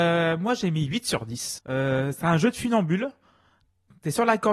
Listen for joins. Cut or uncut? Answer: cut